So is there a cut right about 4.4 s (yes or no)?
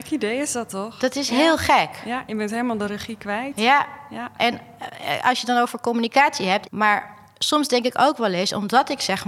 yes